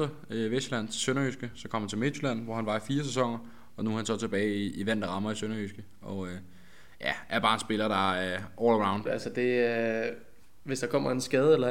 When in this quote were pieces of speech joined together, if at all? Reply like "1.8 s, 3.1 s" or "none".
9.1 s